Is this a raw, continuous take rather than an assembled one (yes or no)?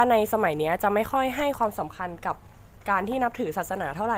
yes